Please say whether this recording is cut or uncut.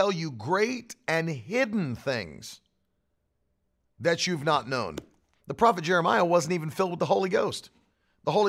cut